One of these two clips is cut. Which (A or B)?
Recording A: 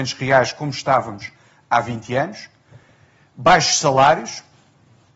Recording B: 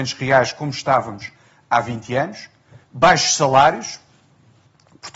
B